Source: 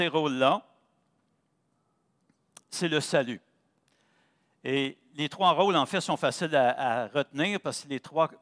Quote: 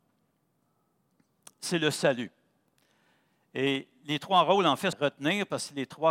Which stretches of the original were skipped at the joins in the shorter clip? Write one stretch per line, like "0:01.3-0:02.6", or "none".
0:06.0-0:07.1